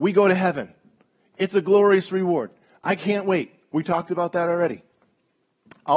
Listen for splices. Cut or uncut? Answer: uncut